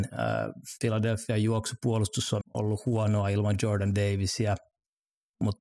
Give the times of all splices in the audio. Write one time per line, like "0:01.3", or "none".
0:02.4